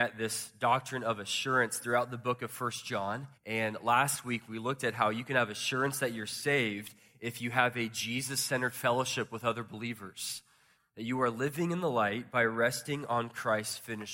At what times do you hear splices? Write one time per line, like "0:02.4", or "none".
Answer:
0:03.4
0:10.8